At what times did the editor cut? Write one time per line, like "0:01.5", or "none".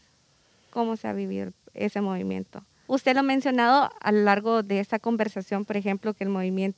0:02.9